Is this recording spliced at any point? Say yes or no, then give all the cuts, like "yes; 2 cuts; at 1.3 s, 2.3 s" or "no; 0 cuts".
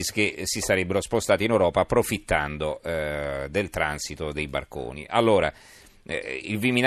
no; 0 cuts